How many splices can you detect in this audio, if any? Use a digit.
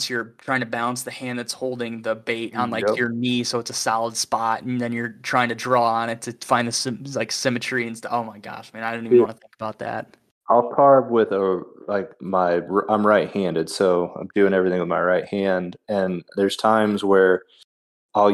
0